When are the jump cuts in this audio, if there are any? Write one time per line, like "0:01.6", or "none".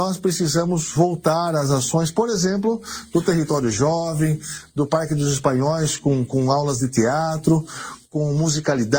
none